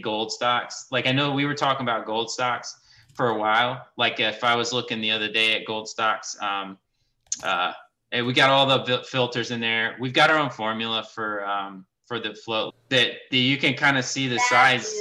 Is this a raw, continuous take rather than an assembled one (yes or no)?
no